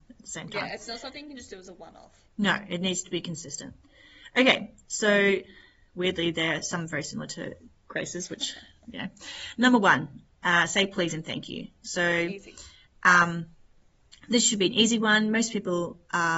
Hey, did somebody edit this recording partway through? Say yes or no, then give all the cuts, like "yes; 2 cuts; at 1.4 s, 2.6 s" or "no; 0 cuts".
no; 0 cuts